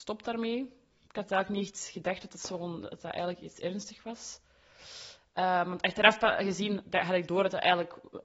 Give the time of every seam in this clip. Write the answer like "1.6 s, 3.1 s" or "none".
none